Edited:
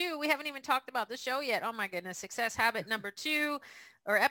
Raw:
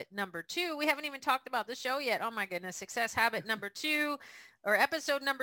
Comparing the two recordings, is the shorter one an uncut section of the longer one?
yes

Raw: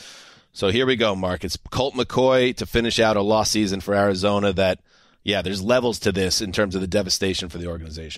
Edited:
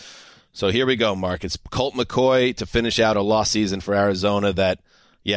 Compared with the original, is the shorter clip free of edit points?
yes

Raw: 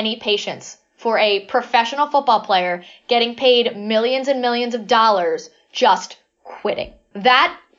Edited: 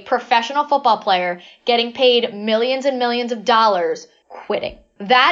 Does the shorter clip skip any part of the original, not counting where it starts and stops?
yes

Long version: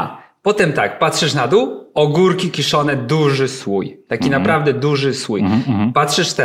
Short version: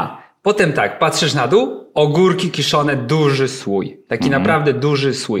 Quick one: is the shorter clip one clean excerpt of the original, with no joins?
yes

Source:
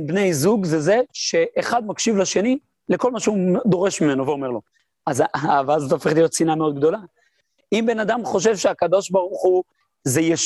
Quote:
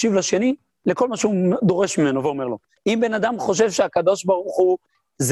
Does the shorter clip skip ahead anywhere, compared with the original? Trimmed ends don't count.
yes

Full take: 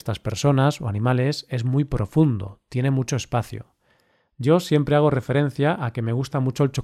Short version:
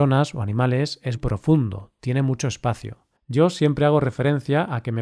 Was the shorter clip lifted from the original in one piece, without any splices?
no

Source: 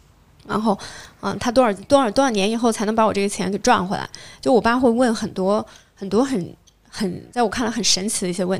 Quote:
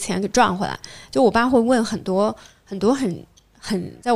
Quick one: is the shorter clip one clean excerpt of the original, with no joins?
yes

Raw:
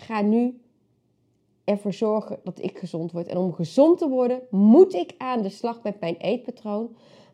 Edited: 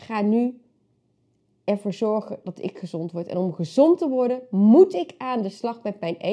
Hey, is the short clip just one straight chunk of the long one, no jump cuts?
yes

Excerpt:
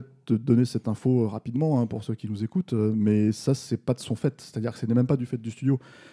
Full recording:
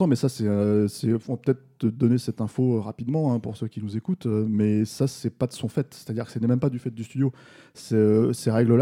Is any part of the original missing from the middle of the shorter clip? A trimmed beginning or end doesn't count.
no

